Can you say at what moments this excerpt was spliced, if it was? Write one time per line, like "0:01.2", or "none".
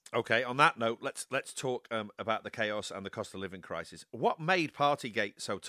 none